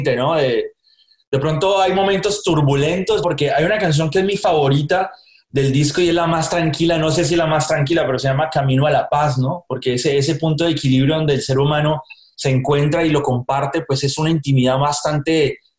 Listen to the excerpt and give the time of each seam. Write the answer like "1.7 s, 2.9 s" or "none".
3.2 s